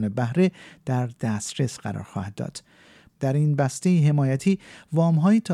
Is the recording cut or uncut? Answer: cut